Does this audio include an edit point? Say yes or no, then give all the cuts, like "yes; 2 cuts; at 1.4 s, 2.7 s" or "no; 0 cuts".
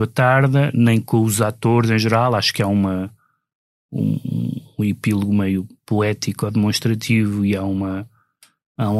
no; 0 cuts